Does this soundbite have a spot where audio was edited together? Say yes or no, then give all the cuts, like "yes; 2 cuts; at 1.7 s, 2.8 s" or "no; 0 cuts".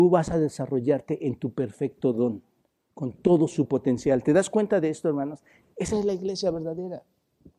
no; 0 cuts